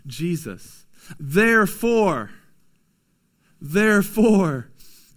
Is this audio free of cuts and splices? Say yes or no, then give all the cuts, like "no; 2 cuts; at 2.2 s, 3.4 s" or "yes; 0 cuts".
no; 1 cut; at 1.2 s